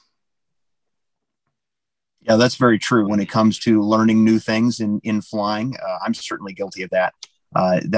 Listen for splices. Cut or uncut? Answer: cut